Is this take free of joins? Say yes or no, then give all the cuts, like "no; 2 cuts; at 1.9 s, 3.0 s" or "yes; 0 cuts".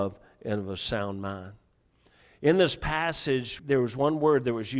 no; 1 cut; at 3.6 s